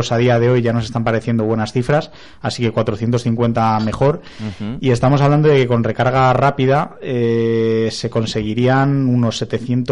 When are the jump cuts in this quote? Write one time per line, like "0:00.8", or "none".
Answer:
none